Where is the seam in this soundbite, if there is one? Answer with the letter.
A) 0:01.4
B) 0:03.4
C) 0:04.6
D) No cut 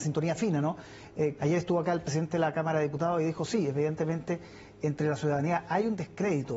A